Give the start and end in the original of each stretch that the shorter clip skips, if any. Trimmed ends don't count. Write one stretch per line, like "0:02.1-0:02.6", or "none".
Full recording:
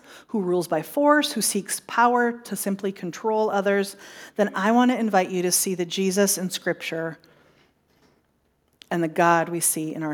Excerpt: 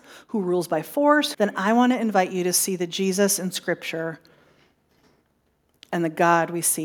0:01.3-0:04.3